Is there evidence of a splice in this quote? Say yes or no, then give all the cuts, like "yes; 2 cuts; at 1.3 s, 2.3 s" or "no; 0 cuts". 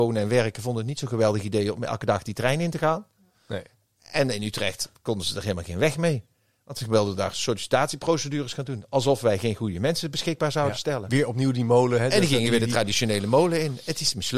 no; 0 cuts